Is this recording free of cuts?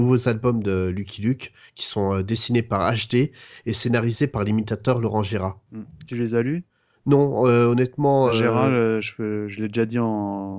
yes; 0 cuts

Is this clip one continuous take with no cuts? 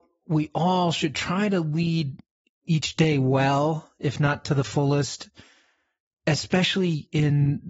no; 1 cut; at 6.1 s

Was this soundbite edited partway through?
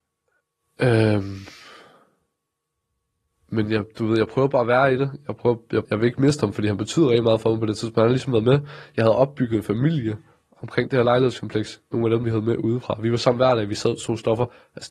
yes; 2 cuts; at 5.8 s, 12.2 s

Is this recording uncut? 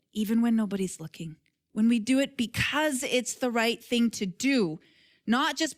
yes; 0 cuts

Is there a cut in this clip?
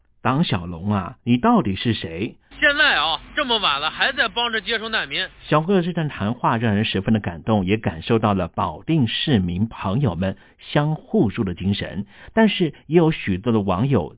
yes; 2 cuts; at 2.5 s, 11.0 s

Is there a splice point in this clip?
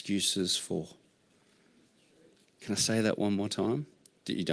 no; 0 cuts

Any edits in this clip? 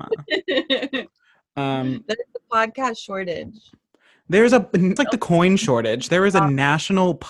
yes; 1 cut; at 5.0 s

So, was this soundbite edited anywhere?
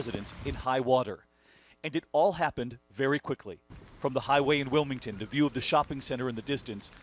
no; 0 cuts

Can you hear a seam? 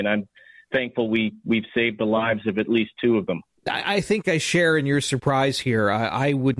no; 0 cuts

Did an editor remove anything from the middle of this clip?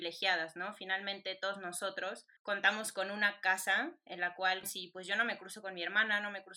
yes; 2 cuts; at 2.4 s, 4.6 s

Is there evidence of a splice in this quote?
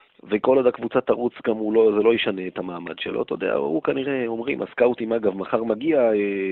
no; 0 cuts

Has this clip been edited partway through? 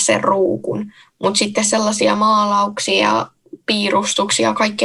no; 0 cuts

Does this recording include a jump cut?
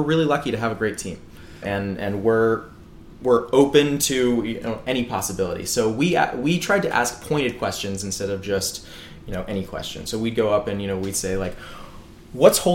yes; 1 cut; at 1.6 s

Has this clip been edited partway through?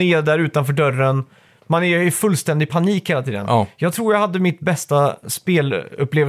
no; 0 cuts

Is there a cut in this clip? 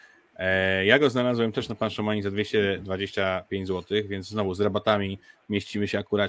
no; 0 cuts

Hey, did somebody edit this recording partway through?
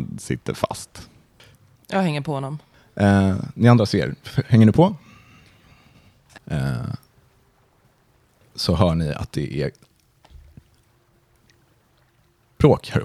yes; 2 cuts; at 1.7 s, 6.4 s

